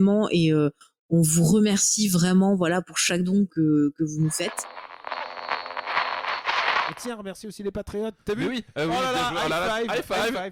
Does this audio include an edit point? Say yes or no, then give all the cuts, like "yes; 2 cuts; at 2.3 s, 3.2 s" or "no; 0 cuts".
yes; 1 cut; at 3.5 s